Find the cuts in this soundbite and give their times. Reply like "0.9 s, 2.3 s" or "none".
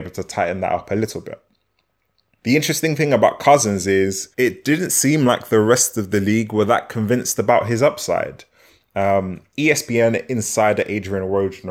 4.3 s